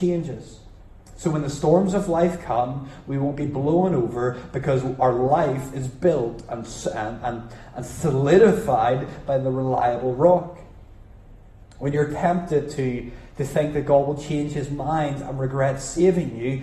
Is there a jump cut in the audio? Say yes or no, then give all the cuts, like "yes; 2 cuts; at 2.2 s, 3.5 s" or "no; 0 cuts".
no; 0 cuts